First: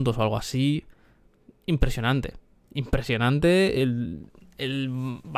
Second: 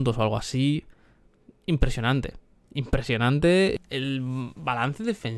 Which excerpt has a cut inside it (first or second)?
second